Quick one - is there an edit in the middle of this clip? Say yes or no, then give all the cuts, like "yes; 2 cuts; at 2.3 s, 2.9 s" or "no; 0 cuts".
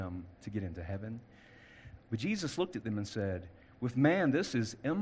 yes; 1 cut; at 2.0 s